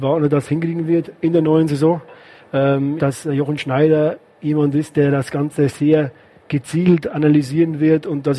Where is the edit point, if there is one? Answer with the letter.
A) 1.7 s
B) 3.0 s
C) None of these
B